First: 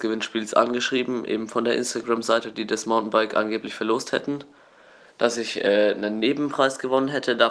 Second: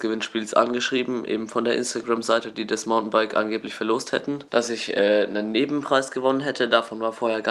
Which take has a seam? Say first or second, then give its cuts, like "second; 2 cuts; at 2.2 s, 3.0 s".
second; 1 cut; at 4.5 s